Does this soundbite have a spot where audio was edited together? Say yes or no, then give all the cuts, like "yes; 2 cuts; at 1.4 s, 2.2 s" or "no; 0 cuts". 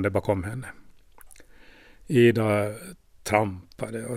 no; 0 cuts